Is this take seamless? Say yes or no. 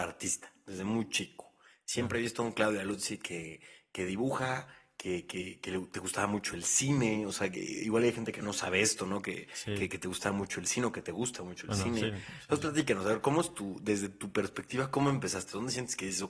yes